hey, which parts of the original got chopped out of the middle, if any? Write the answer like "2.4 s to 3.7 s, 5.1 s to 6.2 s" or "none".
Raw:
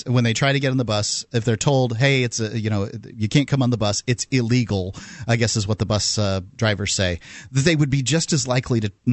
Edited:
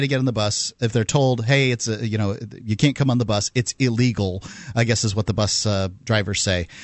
none